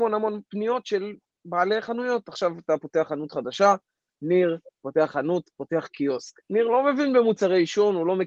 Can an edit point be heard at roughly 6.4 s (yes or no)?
yes